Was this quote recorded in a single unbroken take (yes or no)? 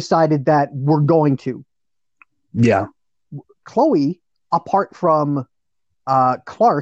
no